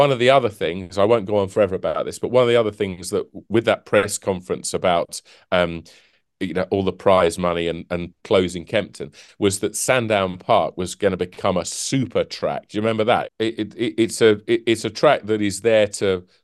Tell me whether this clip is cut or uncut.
cut